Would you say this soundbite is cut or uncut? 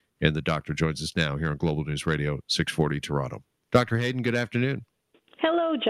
uncut